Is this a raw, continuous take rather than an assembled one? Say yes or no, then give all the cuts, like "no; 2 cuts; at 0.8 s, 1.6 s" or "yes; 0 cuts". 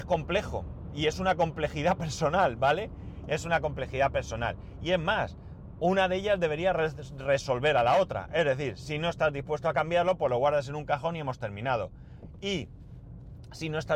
yes; 0 cuts